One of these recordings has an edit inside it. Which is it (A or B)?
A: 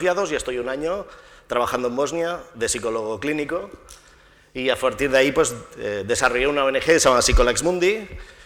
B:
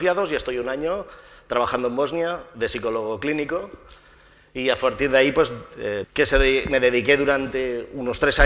B